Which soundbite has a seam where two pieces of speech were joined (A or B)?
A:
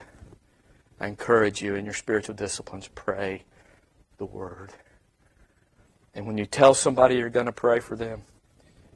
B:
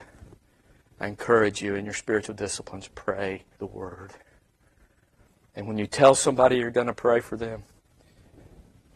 B